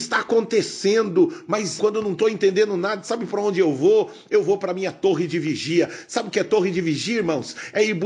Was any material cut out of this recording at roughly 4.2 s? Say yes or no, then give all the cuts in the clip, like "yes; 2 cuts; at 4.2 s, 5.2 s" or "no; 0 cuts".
no; 1 cut; at 1.8 s